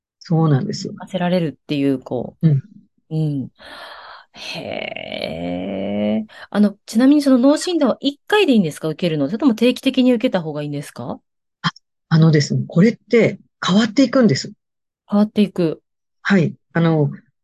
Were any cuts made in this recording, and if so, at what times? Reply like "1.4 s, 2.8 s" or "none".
none